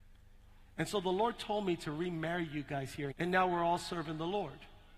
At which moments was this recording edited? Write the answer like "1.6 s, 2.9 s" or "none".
3.1 s